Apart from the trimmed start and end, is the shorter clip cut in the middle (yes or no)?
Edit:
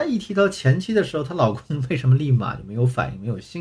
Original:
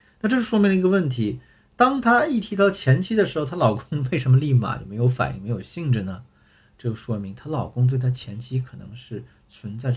no